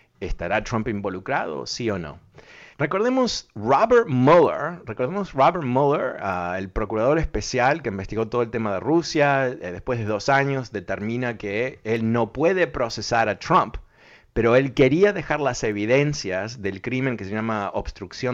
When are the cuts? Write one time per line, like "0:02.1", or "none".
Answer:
0:02.7